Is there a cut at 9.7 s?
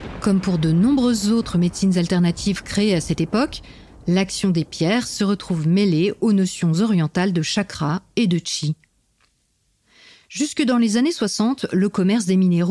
no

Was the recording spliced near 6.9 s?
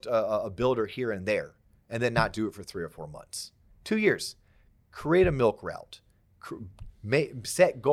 yes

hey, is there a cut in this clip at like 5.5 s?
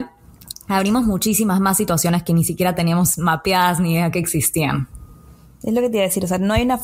no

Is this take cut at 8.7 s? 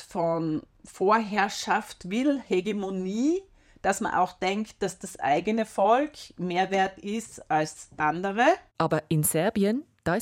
yes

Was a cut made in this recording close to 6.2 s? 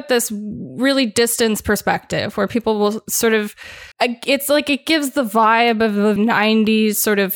yes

